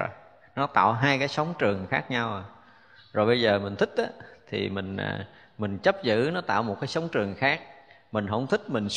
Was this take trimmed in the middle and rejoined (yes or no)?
no